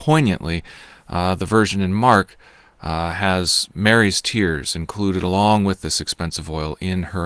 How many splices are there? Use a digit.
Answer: 0